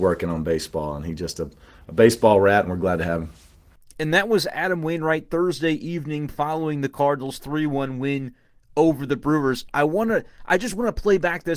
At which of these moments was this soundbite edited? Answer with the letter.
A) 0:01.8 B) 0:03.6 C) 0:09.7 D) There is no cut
C